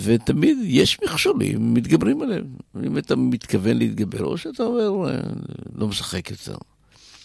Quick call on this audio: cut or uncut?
uncut